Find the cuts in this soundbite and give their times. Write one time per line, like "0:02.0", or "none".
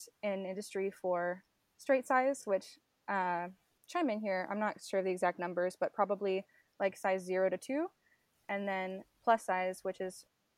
none